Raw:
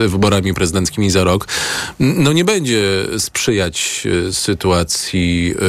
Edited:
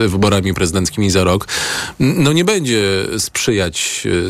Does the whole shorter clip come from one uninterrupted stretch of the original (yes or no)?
yes